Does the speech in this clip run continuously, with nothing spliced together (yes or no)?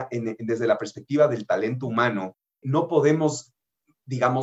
no